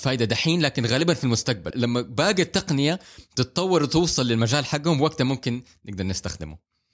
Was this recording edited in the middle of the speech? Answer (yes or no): yes